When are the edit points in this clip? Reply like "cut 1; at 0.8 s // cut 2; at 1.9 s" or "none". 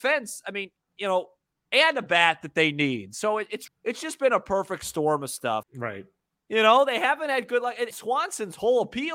cut 1; at 3.7 s // cut 2; at 5.6 s // cut 3; at 7.9 s